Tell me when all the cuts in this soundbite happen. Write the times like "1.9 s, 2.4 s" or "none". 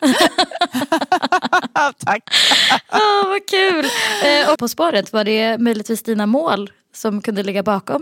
4.6 s